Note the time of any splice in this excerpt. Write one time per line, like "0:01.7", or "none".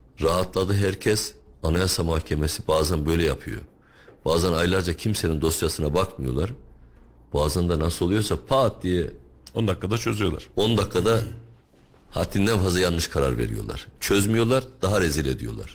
none